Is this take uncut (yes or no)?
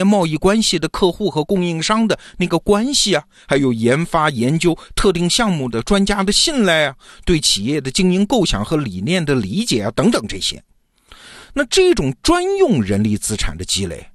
yes